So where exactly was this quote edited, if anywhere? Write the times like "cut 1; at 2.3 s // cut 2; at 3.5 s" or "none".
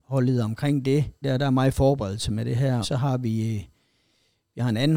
cut 1; at 1.2 s // cut 2; at 2.8 s